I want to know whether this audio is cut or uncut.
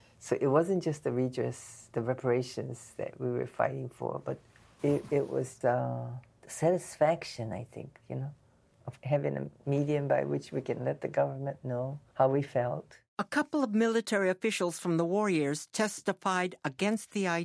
cut